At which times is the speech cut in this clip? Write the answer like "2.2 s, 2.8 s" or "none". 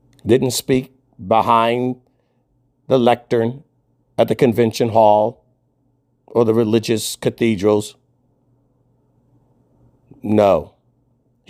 none